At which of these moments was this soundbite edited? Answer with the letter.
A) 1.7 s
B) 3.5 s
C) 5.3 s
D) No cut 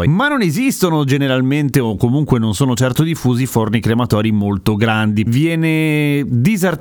C